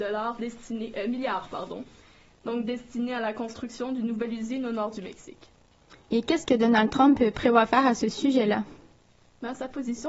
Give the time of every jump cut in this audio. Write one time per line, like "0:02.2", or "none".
0:06.1